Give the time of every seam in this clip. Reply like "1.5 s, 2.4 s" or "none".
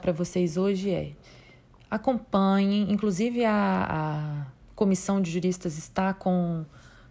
none